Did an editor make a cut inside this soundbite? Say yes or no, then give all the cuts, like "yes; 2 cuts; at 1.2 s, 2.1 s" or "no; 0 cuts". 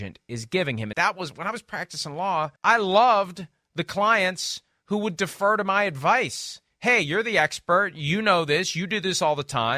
yes; 2 cuts; at 0.9 s, 2.6 s